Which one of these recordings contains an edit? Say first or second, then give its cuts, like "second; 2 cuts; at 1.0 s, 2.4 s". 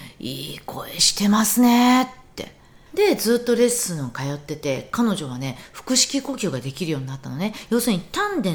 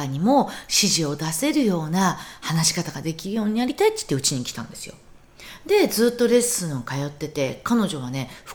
first; 1 cut; at 2.9 s